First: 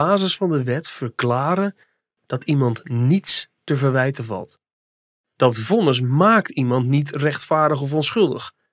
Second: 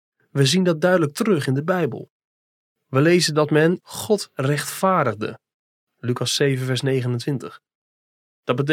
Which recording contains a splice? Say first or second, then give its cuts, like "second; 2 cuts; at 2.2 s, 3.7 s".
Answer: second; 1 cut; at 3.8 s